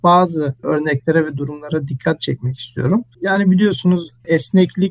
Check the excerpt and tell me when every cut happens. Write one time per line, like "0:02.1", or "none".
none